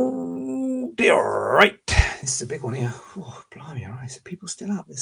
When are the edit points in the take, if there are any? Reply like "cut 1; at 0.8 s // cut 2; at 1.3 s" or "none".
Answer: none

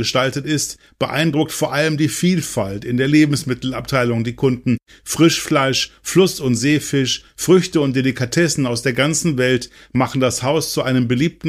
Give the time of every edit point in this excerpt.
none

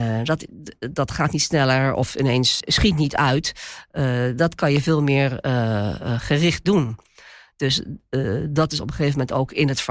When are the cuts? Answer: cut 1; at 2.6 s

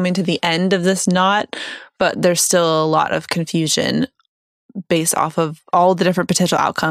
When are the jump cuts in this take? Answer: none

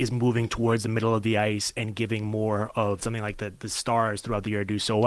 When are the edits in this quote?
cut 1; at 3.0 s

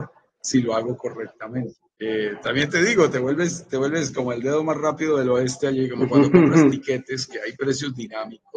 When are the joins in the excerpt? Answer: cut 1; at 1.9 s

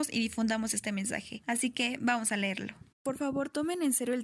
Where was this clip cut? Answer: cut 1; at 2.9 s

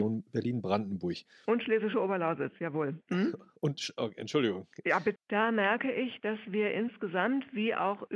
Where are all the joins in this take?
cut 1; at 5.2 s

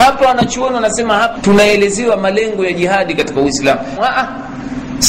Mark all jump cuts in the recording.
cut 1; at 1.4 s // cut 2; at 4.0 s

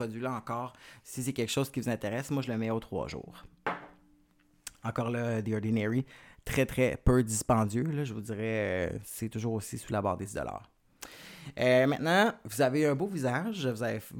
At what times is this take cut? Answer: none

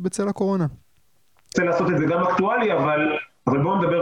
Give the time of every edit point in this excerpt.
cut 1; at 1.5 s

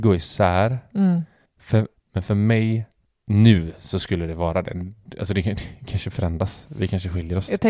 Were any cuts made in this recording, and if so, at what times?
cut 1; at 1.9 s

